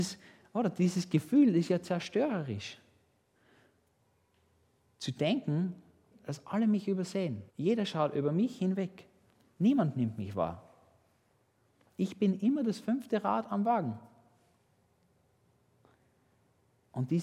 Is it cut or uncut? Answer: cut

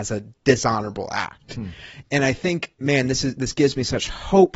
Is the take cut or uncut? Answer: uncut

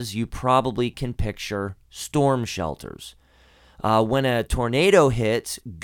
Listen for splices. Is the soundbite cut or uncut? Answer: uncut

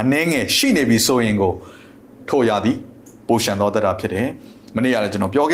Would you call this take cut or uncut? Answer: uncut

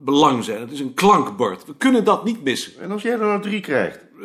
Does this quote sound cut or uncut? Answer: uncut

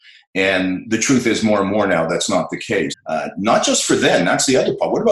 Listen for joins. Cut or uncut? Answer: cut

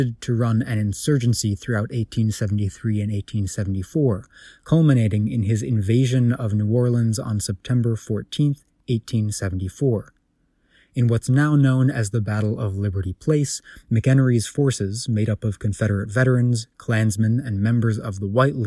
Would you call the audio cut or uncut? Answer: uncut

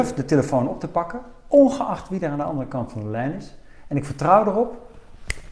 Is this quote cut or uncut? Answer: uncut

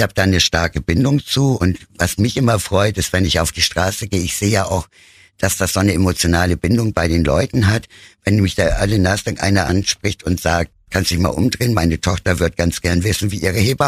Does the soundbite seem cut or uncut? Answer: uncut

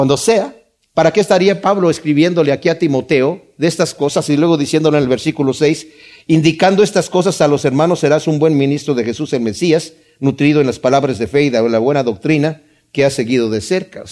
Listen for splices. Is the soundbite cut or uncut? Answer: uncut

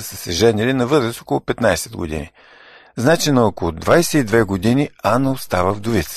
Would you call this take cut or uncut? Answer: uncut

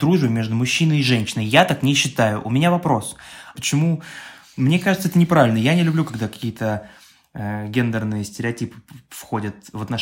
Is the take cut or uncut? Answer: cut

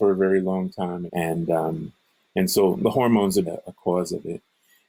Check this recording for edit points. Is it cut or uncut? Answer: cut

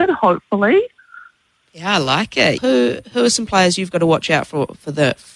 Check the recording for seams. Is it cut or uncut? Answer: cut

